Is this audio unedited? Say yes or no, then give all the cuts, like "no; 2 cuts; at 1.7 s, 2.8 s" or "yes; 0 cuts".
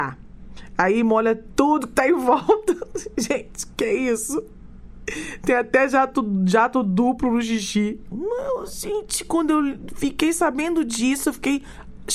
no; 1 cut; at 8.1 s